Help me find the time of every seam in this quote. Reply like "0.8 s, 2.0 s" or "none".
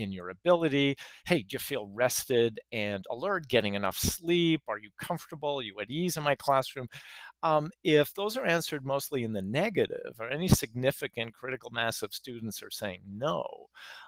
none